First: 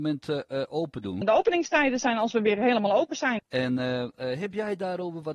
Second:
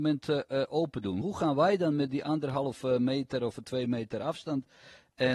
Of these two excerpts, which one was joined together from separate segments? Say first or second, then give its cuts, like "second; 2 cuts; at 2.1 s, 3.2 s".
first; 2 cuts; at 1.2 s, 3.4 s